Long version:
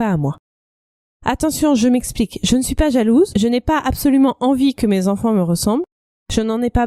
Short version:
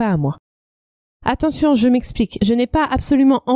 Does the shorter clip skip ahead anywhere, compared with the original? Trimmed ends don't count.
yes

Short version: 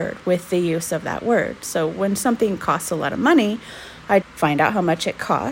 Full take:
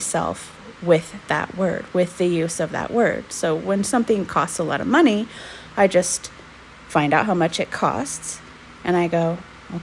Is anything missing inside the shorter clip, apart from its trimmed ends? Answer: yes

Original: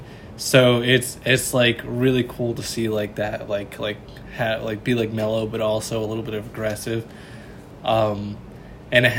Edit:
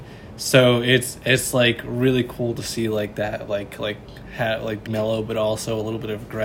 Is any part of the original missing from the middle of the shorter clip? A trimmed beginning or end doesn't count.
yes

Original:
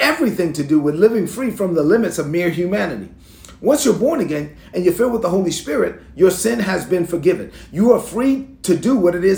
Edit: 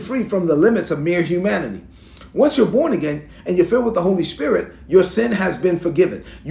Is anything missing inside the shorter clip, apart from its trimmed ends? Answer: no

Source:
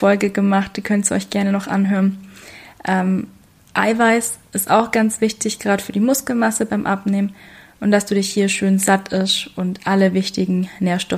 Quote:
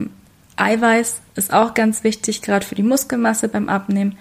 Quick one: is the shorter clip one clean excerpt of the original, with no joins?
yes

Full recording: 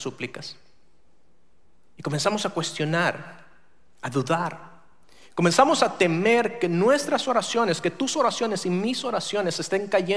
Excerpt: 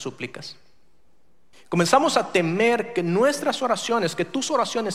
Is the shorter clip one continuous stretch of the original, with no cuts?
no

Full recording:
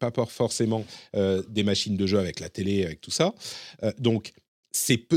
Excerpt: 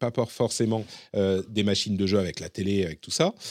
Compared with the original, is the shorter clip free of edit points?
yes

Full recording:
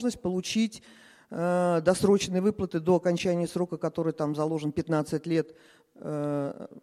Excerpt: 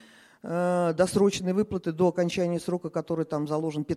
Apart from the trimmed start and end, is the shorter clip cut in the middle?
no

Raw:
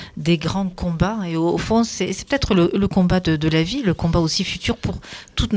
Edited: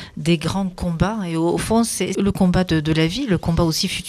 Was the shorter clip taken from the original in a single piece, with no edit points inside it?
no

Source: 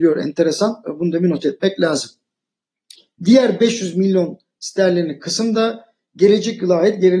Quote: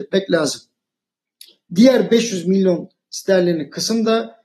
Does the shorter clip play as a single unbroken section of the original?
yes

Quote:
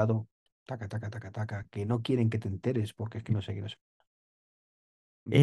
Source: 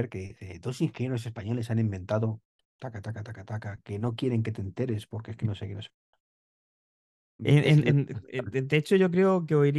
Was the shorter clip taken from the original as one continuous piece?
yes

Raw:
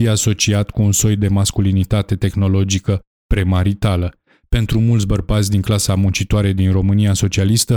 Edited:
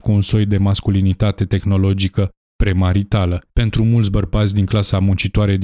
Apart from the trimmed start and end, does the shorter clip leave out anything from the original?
yes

